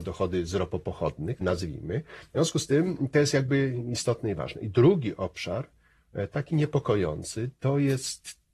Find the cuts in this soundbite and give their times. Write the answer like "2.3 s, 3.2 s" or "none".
1.4 s